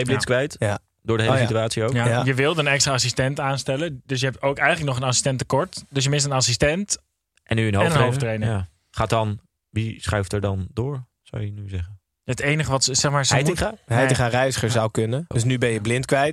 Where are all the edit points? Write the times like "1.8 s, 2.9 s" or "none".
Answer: 15.3 s